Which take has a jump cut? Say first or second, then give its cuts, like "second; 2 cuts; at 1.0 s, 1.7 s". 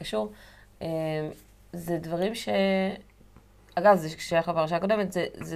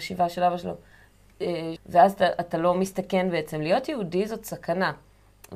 second; 1 cut; at 1.8 s